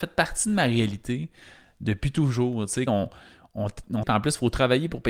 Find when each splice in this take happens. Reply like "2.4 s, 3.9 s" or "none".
2.9 s, 4.0 s